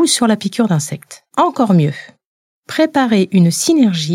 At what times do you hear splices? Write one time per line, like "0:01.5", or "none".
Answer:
0:01.3